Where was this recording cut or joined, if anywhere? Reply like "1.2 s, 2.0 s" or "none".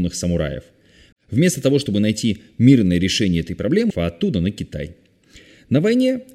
1.1 s, 3.9 s